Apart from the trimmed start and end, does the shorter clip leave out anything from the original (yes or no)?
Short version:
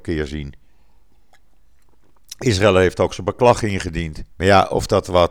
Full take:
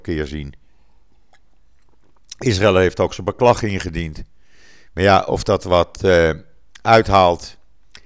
yes